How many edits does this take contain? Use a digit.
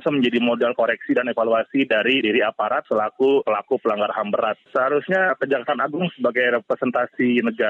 1